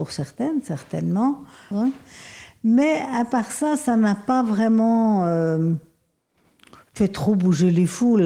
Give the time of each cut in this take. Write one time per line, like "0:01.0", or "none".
0:01.7